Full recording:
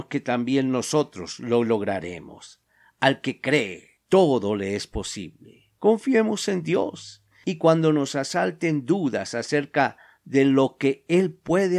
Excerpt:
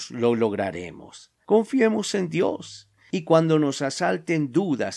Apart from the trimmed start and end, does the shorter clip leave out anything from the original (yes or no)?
yes